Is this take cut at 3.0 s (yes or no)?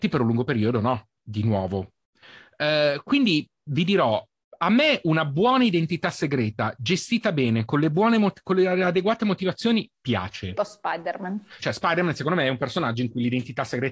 no